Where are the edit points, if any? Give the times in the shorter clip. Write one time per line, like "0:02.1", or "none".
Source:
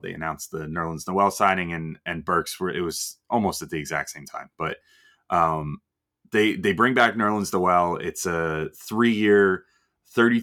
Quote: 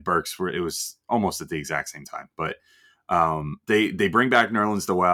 0:03.6